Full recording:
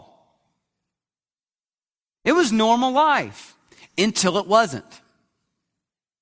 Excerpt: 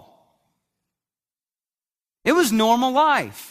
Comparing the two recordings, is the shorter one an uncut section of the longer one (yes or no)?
yes